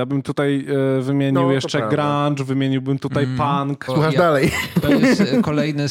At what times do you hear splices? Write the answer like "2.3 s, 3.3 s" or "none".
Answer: 3.9 s

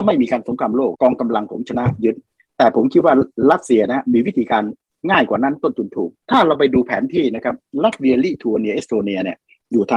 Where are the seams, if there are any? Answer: 0.9 s, 6.2 s

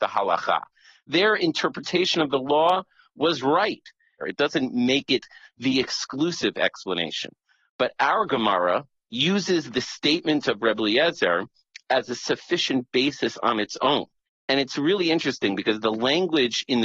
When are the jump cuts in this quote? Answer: 4.2 s, 14.3 s

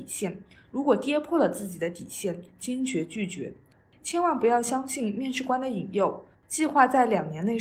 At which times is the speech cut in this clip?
6.3 s

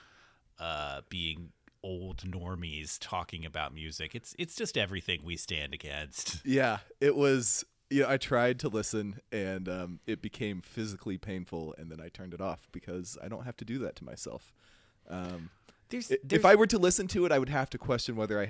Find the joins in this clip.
none

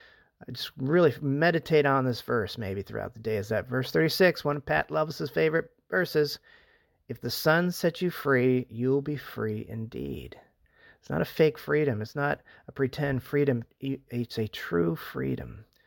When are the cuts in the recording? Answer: none

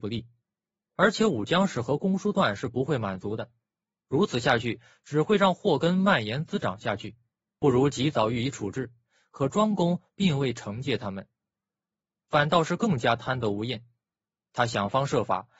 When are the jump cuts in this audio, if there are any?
12.2 s

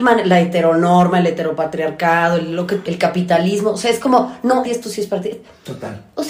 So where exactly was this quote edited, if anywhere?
2.8 s, 4.6 s

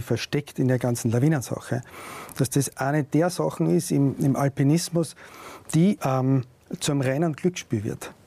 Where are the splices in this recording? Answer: 4.2 s, 6.0 s

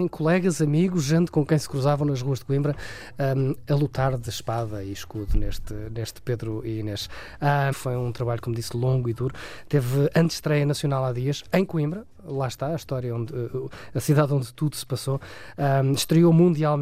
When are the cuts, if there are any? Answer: 7.7 s

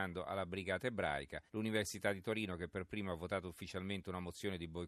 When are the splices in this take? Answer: 1.5 s

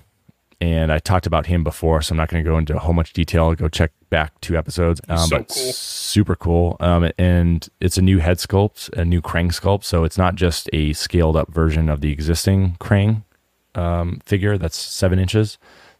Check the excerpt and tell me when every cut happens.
5.0 s

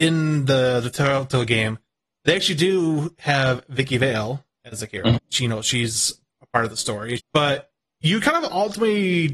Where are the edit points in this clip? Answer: 5.2 s, 7.2 s

